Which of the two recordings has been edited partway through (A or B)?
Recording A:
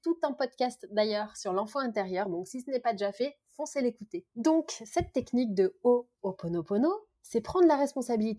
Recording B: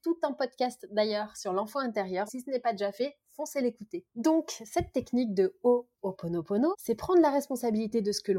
B